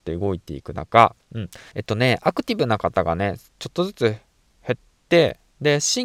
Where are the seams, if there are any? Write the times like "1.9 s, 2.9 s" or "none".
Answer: 1.7 s